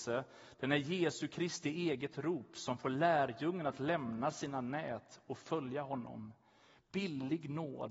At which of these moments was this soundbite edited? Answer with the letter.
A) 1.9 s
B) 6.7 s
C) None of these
C